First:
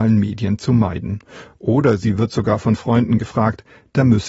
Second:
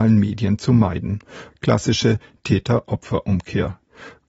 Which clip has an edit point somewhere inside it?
second; 1 cut; at 1.5 s

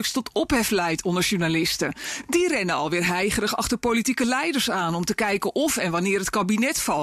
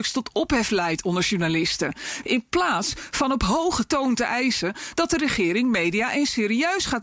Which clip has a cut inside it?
second; 1 cut; at 2.2 s

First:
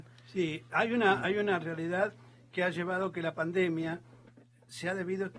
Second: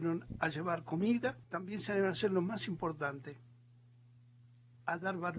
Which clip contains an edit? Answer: second; 1 cut; at 1.4 s

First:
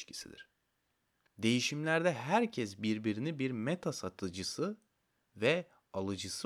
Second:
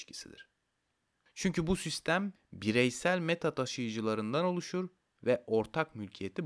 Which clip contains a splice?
first; 1 cut; at 1.3 s

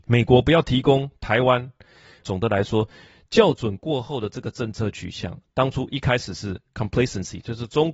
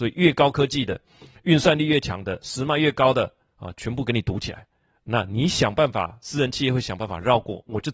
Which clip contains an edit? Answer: first; 1 cut; at 2.2 s

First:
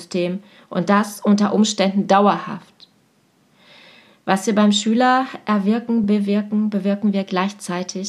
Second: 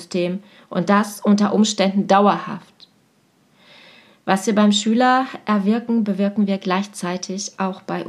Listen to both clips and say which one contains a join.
second; 1 cut; at 6.0 s

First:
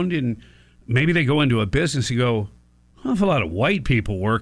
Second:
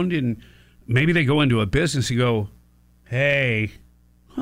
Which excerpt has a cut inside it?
first; 1 cut; at 2.9 s

